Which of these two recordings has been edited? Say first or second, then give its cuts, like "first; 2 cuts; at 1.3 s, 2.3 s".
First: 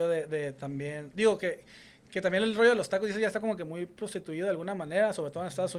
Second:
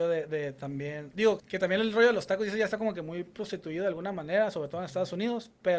second; 1 cut; at 1.4 s